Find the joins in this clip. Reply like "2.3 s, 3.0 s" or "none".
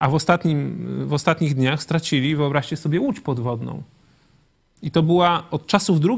none